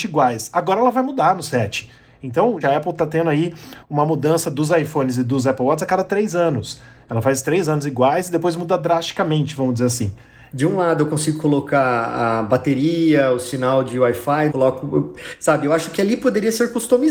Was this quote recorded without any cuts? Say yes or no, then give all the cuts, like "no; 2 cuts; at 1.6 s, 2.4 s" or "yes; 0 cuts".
no; 3 cuts; at 2.6 s, 10.5 s, 14.5 s